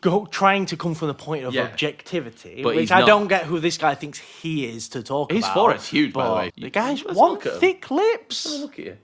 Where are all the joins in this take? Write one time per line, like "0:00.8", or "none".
0:06.5

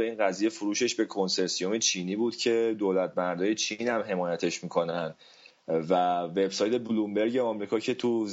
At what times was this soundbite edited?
none

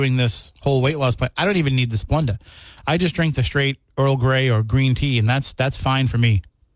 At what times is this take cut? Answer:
none

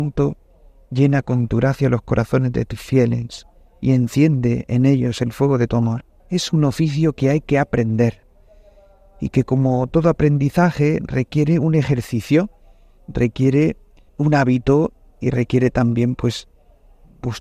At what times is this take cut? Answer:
0:06.2
0:14.1

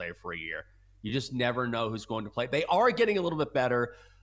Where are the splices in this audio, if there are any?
none

